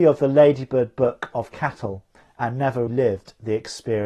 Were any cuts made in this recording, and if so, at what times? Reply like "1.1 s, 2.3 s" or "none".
2.9 s